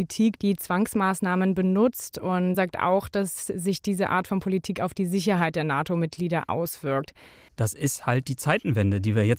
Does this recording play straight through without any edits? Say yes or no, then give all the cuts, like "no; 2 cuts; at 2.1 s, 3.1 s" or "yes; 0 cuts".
no; 2 cuts; at 2.5 s, 7.5 s